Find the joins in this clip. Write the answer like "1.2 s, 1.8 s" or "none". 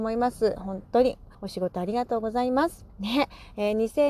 1.3 s, 2.9 s